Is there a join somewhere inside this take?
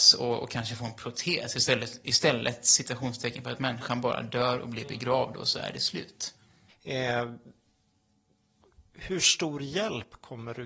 yes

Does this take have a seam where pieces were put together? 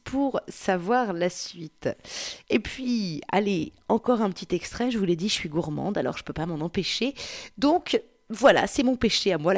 no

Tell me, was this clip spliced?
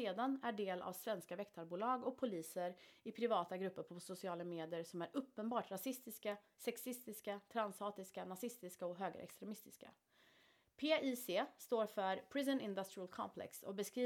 no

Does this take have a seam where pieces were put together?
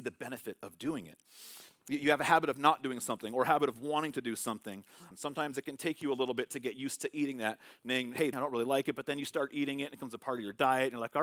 yes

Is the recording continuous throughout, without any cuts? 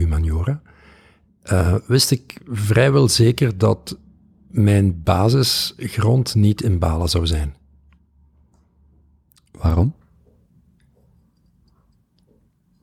yes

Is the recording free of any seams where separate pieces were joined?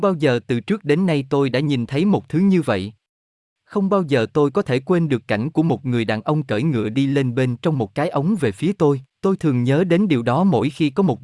no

